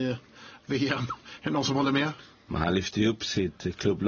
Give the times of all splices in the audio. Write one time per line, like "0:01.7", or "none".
none

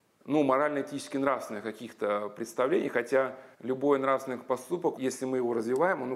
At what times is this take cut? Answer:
0:03.5
0:05.0

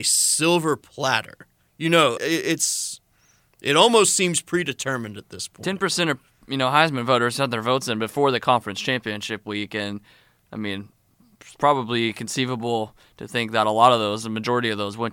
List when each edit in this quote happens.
0:02.2

